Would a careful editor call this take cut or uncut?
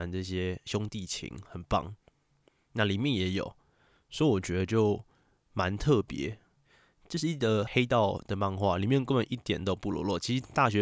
cut